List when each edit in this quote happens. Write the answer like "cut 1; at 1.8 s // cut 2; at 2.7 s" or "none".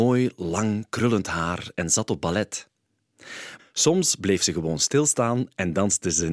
cut 1; at 3.6 s